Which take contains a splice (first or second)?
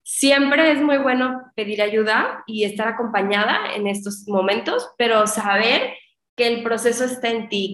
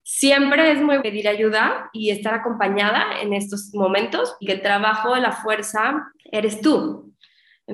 second